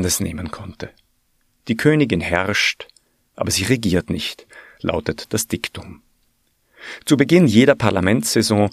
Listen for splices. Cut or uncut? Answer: uncut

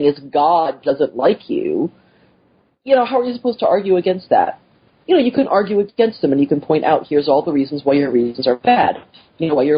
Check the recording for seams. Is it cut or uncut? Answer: cut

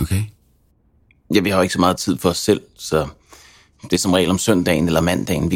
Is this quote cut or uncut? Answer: uncut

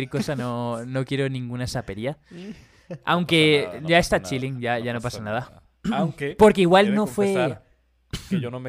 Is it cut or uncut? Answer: uncut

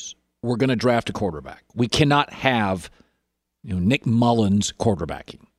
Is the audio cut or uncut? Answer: uncut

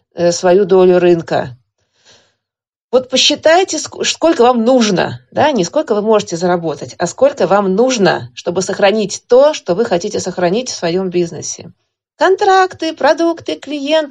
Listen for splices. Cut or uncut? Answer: cut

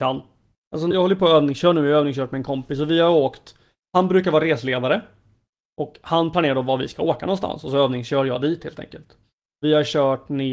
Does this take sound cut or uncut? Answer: cut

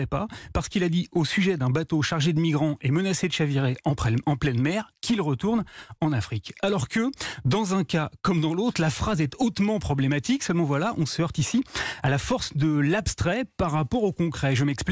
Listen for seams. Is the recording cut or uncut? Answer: uncut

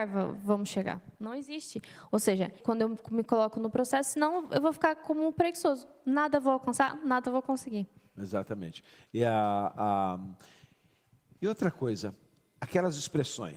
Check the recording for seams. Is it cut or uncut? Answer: cut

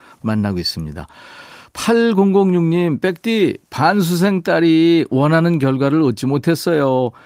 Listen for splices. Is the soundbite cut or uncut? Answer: uncut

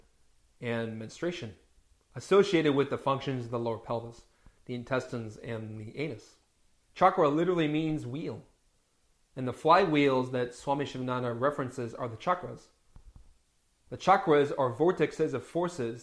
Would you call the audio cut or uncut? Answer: cut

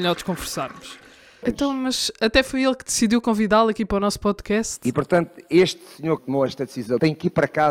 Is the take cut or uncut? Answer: cut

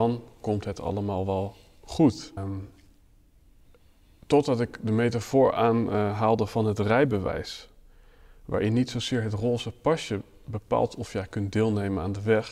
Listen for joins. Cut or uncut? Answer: cut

